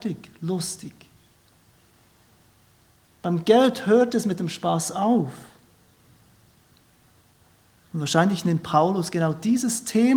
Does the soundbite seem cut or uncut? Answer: uncut